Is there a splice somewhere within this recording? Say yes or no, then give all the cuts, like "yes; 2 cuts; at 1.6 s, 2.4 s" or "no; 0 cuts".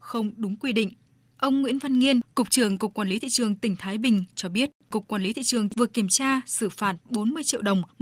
no; 0 cuts